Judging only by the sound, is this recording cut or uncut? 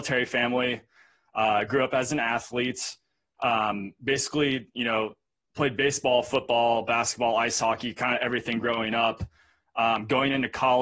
uncut